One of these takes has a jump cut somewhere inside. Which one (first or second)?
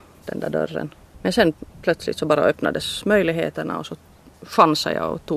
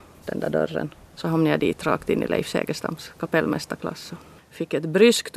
second